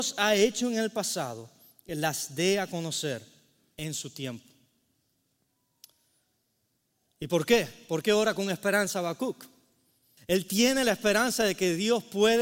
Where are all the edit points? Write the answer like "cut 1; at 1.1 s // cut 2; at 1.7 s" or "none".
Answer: cut 1; at 10.2 s